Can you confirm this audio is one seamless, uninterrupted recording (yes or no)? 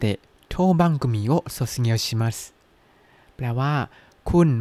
yes